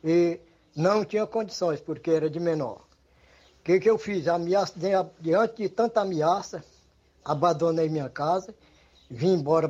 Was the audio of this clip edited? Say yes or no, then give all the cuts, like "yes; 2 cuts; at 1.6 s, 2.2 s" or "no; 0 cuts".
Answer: no; 0 cuts